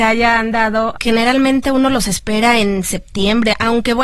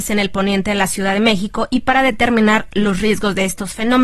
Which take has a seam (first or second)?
first